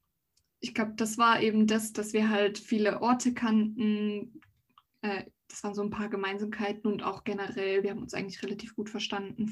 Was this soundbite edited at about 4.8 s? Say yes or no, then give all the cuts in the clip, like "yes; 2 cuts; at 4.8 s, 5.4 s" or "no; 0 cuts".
no; 0 cuts